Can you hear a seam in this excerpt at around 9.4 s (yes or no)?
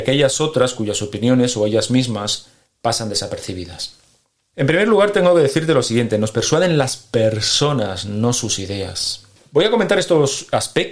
yes